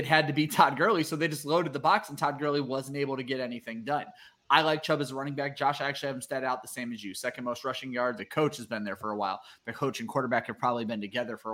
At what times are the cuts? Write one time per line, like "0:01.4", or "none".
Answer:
0:08.2